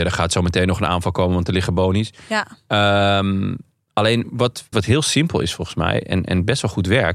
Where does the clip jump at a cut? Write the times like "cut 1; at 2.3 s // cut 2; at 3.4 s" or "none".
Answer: cut 1; at 4.7 s